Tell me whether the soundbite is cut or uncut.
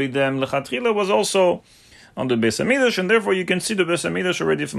uncut